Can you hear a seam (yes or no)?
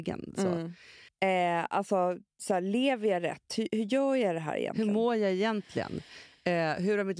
yes